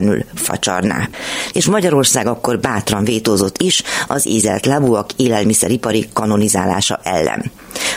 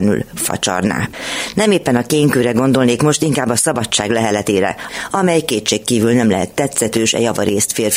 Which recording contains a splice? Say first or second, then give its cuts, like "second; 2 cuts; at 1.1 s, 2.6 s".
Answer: first; 1 cut; at 1.5 s